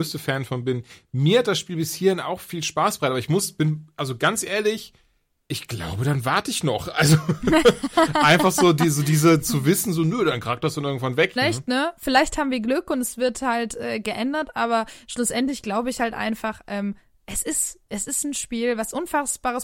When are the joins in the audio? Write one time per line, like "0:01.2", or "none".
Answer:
0:11.4